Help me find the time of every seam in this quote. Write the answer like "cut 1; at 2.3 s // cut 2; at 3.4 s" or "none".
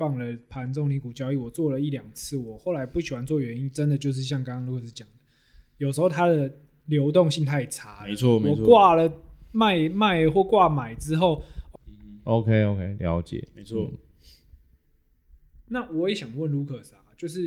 cut 1; at 11.7 s